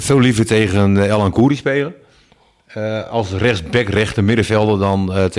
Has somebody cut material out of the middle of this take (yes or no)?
no